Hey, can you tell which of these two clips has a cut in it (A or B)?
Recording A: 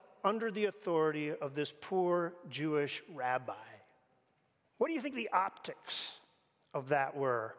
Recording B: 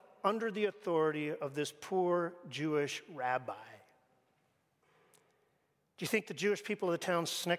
A